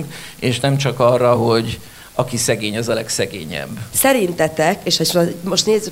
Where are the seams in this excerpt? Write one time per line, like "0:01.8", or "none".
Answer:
none